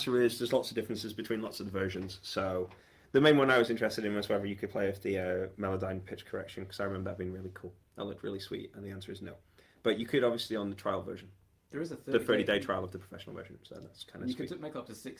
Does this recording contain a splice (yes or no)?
no